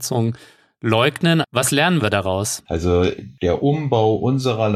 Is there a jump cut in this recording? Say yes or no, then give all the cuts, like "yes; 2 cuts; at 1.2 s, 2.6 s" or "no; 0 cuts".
yes; 2 cuts; at 1.4 s, 2.7 s